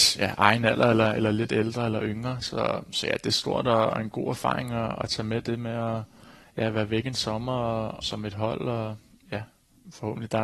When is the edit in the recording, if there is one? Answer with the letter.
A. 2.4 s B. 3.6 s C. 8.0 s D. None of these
C